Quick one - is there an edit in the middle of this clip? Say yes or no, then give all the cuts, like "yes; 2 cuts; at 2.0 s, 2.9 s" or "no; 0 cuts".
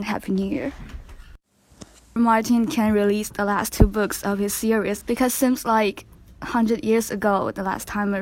yes; 2 cuts; at 2.2 s, 5.0 s